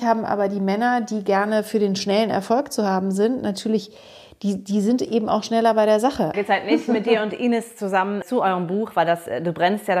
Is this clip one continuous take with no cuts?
no; 2 cuts; at 6.3 s, 8.2 s

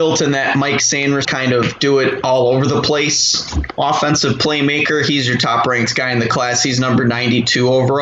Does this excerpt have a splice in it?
yes; 1 cut; at 1.2 s

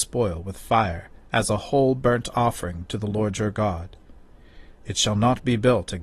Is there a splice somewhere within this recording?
yes; 1 cut; at 4.8 s

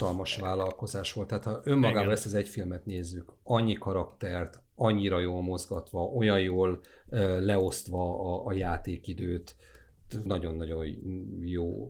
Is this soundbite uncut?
no; 1 cut; at 10.3 s

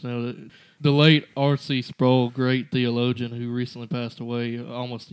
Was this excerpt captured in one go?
yes; 0 cuts

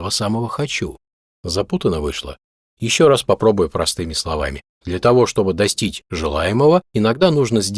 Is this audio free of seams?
yes; 0 cuts

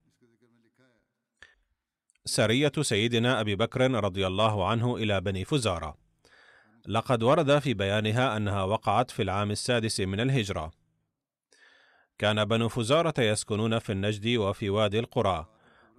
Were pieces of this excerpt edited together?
no; 0 cuts

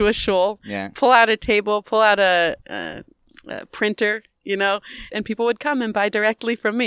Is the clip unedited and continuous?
no; 2 cuts; at 2.6 s, 5.1 s

